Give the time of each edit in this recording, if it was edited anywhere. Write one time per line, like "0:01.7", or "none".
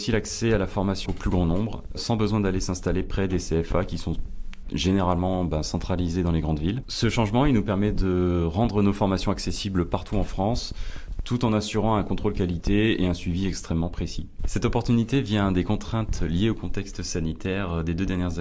0:01.1
0:06.8